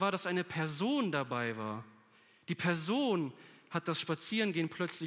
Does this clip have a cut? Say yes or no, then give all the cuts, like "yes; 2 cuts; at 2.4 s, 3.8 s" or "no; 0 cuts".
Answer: no; 0 cuts